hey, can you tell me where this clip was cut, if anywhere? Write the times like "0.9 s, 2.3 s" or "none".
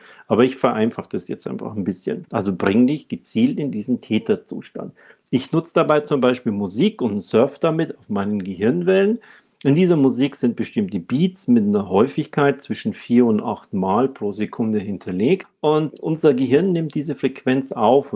2.2 s

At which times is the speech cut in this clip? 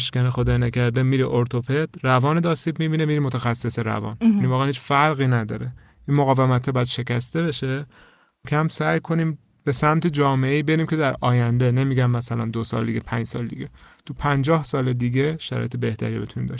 8.4 s

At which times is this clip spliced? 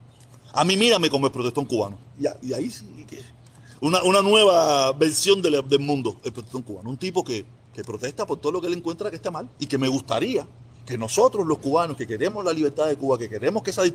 7.7 s, 9.5 s

